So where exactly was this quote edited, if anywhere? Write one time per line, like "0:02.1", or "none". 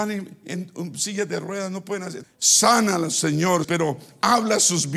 0:02.2
0:03.6